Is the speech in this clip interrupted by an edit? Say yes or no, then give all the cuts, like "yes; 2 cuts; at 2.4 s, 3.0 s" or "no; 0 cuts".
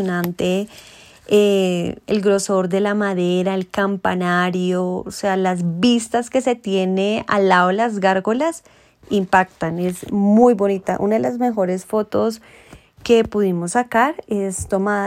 no; 0 cuts